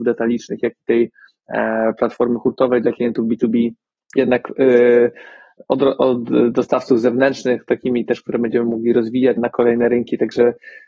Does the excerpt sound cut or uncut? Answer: cut